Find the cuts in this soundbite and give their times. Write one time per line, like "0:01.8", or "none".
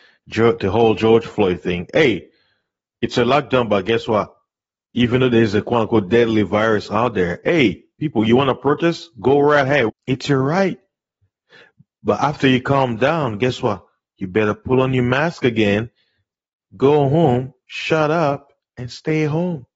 0:09.9